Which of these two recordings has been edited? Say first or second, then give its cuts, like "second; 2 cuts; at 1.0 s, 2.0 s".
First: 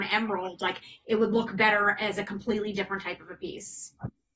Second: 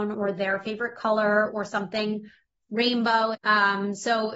second; 1 cut; at 3.3 s